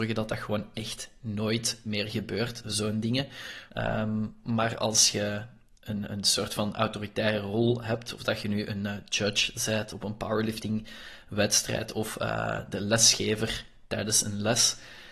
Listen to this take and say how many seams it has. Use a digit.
1